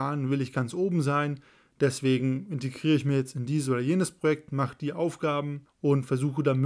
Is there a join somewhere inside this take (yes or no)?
no